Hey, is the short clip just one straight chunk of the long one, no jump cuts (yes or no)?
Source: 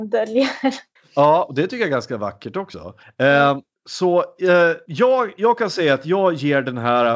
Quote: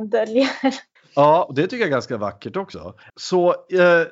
no